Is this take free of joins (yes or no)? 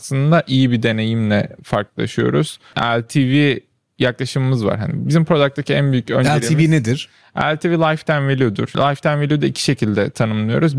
yes